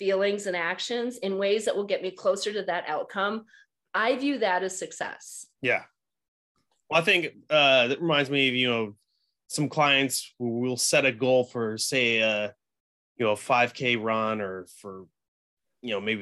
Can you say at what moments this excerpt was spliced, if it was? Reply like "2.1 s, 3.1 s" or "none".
none